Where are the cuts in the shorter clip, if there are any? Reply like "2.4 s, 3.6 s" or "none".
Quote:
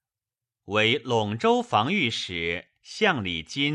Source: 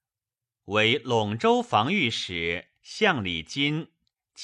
none